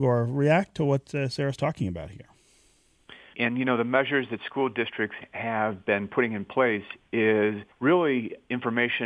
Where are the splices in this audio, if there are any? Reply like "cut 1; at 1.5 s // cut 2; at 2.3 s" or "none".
cut 1; at 3.3 s // cut 2; at 7.7 s